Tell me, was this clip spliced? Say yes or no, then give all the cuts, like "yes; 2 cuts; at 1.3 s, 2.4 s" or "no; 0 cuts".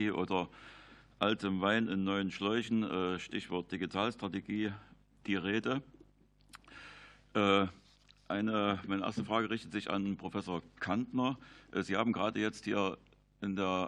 no; 0 cuts